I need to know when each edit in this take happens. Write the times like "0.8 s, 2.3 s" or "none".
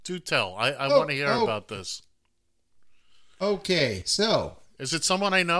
none